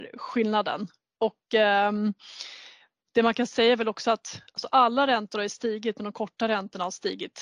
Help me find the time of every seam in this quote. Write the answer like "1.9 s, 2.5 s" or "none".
none

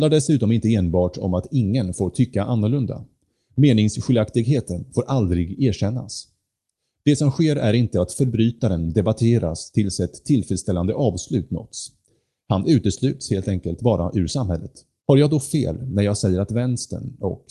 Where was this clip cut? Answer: 15.0 s

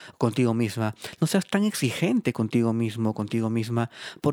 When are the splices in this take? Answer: none

